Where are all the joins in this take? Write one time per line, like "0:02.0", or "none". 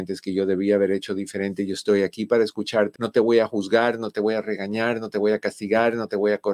0:03.0